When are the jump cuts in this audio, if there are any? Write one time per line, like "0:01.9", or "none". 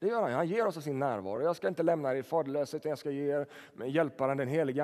none